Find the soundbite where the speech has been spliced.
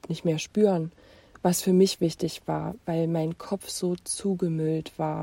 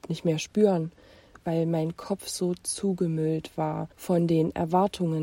second; 2 cuts; at 1.4 s, 3.9 s

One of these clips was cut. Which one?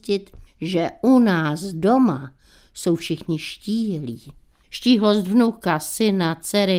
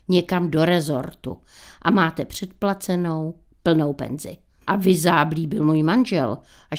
second; 1 cut; at 4.6 s

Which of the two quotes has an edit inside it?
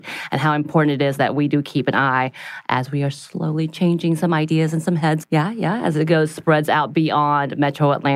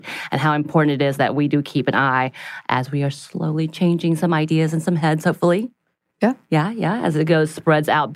first; 1 cut; at 5.2 s

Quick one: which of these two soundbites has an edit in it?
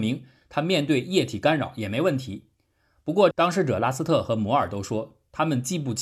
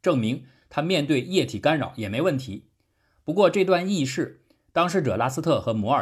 first; 1 cut; at 3.3 s

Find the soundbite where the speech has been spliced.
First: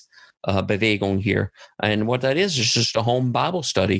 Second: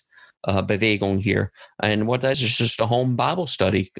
second; 1 cut; at 2.3 s

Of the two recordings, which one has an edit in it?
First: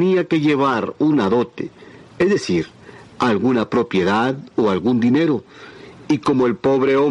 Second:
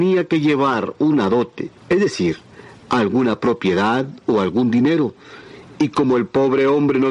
second; 1 cut; at 1.8 s

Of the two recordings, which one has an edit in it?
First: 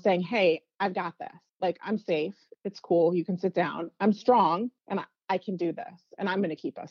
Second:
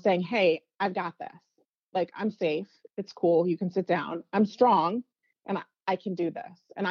first; 2 cuts; at 1.5 s, 4.8 s

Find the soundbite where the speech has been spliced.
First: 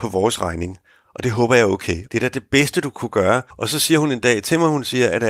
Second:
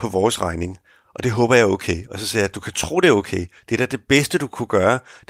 first; 2 cuts; at 2.1 s, 3.5 s

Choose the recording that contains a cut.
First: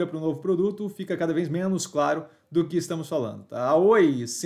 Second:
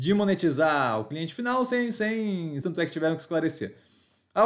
second; 1 cut; at 2.6 s

